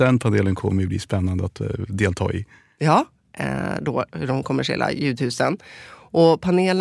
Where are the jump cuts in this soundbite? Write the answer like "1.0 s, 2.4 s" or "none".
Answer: 3.2 s